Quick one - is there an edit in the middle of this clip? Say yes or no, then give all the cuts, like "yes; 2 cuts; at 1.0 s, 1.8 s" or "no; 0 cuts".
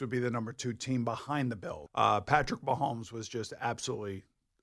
yes; 1 cut; at 1.9 s